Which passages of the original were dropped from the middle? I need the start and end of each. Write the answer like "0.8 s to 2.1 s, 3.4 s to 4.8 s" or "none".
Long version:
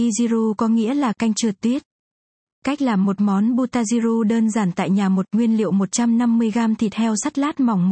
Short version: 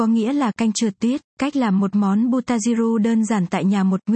1.9 s to 2.5 s